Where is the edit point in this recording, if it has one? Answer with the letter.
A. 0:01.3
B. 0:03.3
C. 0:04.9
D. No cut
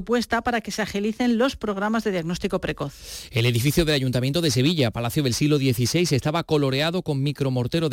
D